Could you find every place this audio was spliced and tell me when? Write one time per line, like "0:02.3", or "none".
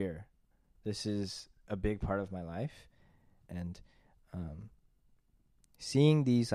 0:03.4